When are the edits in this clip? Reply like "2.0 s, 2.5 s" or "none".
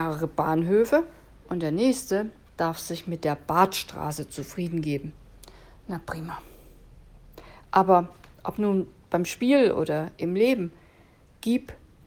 none

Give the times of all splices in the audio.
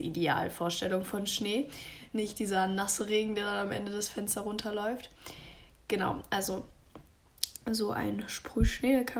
none

